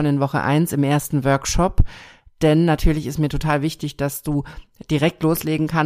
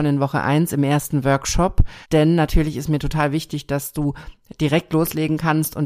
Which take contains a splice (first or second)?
second